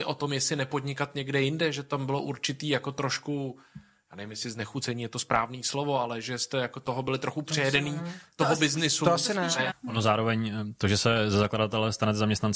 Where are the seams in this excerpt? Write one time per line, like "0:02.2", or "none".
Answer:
0:09.7